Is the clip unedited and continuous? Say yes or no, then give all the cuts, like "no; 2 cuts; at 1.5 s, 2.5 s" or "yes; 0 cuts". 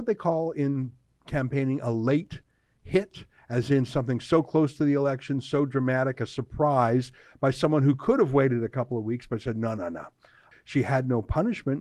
no; 2 cuts; at 6.1 s, 10.5 s